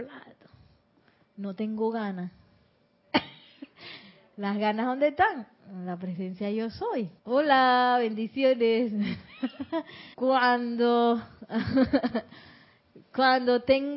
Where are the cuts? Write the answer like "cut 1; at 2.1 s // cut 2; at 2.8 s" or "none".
cut 1; at 7.2 s // cut 2; at 10.1 s